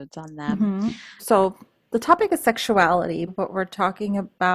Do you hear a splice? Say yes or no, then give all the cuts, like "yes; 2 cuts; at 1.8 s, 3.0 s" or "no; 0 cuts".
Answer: yes; 2 cuts; at 1.2 s, 3.3 s